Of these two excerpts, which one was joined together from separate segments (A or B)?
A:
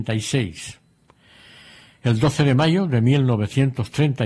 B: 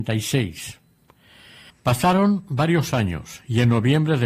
B